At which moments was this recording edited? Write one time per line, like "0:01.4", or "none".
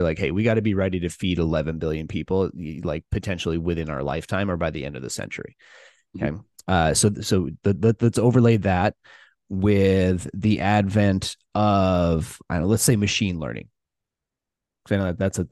none